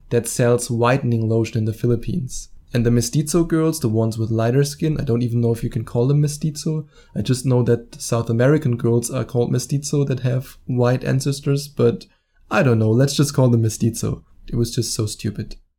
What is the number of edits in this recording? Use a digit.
2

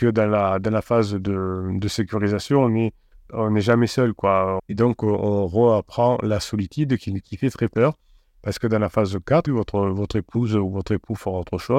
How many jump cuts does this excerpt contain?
2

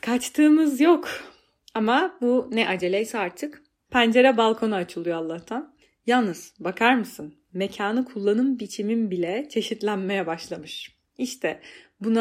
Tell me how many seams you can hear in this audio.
1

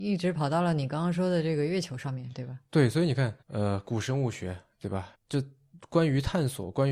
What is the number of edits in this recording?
2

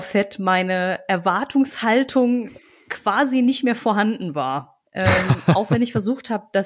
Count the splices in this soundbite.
1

